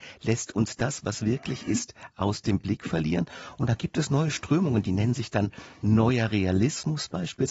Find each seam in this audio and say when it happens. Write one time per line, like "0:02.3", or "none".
none